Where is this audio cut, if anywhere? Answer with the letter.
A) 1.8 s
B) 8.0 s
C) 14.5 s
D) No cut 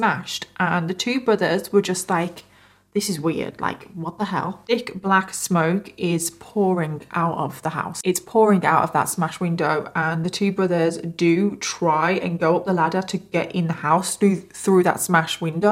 D